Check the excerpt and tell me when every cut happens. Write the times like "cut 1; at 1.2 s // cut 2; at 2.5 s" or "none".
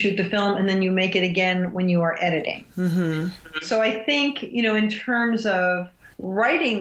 none

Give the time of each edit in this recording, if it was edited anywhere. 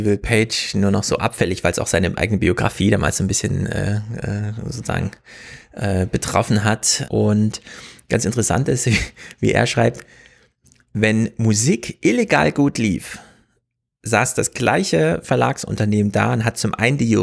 cut 1; at 7.1 s

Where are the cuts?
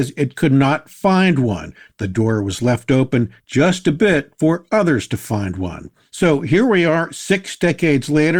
none

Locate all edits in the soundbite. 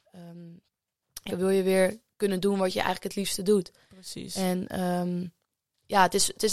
cut 1; at 1.3 s

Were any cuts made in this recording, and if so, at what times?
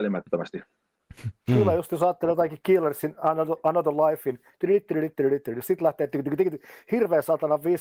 none

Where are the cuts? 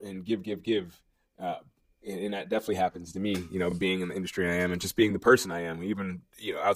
none

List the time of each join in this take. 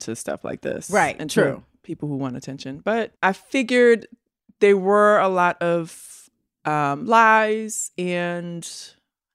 cut 1; at 3.2 s

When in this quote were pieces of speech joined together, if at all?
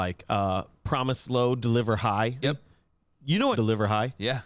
cut 1; at 2.4 s // cut 2; at 3.5 s

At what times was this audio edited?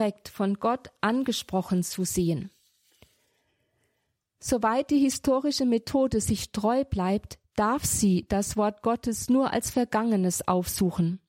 none

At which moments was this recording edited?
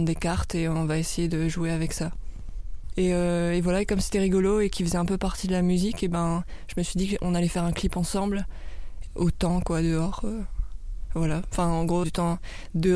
cut 1; at 2.9 s // cut 2; at 9.1 s // cut 3; at 12.0 s

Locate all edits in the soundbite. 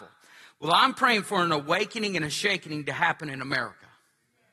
none

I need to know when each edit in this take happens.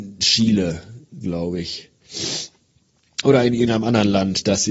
none

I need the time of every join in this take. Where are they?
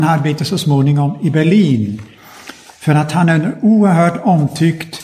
none

